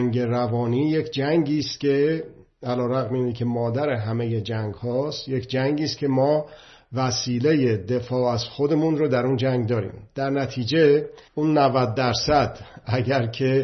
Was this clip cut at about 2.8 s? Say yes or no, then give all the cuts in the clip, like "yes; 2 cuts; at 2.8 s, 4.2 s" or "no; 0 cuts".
no; 1 cut; at 11.3 s